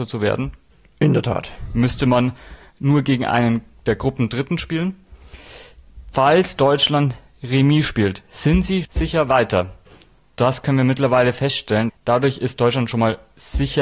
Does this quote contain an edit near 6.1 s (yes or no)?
no